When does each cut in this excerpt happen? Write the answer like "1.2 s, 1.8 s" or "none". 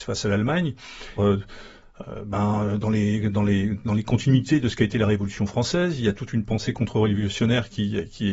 1.2 s